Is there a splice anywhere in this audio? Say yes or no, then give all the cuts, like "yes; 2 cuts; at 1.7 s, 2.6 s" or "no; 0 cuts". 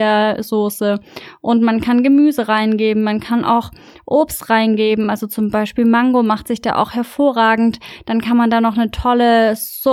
no; 0 cuts